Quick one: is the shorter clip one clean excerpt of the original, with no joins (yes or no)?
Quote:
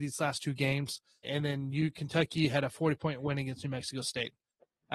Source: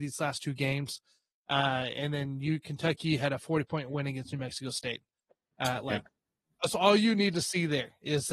no